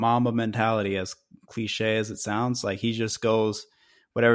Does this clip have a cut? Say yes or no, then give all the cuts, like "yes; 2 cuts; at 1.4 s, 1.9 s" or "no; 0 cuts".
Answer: no; 0 cuts